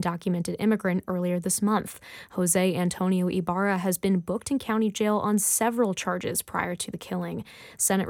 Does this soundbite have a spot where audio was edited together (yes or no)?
no